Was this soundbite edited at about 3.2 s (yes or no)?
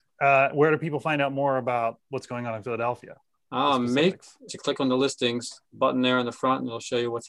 no